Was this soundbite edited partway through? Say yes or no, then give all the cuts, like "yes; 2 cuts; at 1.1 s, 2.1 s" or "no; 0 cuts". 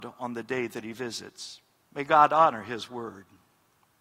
yes; 1 cut; at 1.8 s